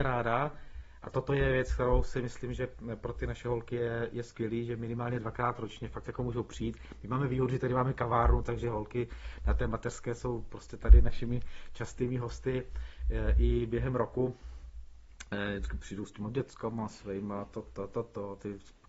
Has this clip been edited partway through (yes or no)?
no